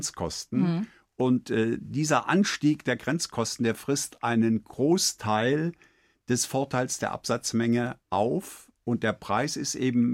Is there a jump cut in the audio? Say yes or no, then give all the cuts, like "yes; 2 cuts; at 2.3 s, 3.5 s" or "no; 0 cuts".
no; 0 cuts